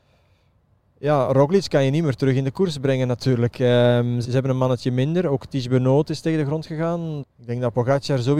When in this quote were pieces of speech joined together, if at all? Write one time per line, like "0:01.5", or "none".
0:04.2
0:07.2